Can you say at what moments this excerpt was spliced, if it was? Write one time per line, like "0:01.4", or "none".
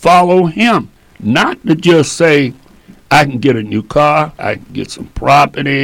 0:04.4